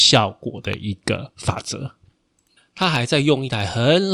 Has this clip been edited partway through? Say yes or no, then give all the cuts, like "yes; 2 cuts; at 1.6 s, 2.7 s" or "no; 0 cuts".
yes; 1 cut; at 2.6 s